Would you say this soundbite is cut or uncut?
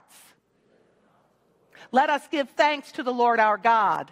uncut